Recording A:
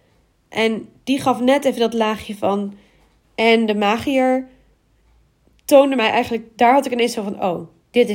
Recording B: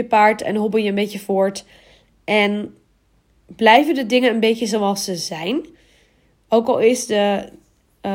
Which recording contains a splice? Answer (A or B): A